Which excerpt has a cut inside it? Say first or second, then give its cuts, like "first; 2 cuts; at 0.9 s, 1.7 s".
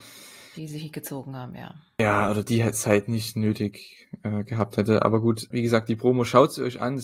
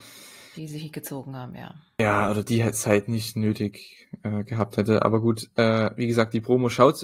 first; 1 cut; at 5.5 s